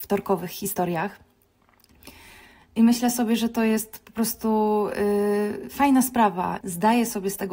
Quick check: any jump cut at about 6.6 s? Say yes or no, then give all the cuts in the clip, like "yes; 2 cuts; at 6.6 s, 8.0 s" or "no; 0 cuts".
yes; 1 cut; at 6.6 s